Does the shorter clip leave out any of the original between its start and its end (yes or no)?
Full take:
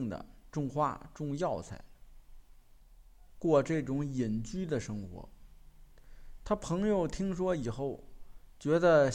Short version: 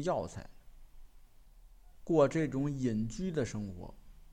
no